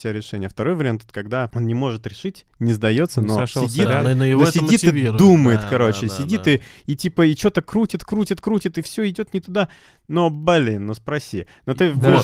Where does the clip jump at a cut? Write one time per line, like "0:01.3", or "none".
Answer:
none